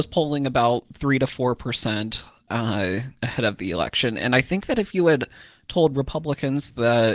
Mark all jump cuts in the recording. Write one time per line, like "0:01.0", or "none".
none